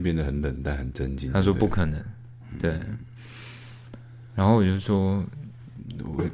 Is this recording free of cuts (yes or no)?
yes